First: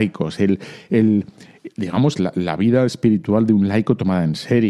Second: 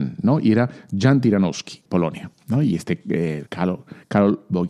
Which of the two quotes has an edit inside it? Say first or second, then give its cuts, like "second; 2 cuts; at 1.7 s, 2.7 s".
second; 2 cuts; at 1.9 s, 3.5 s